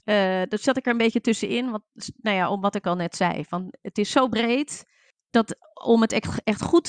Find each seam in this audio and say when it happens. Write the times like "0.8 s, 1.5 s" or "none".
none